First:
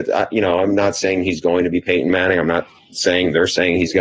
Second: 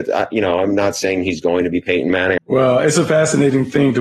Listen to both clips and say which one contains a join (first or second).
second